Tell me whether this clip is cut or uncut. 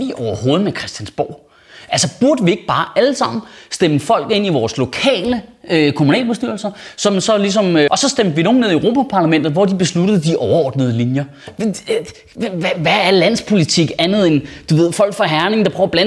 cut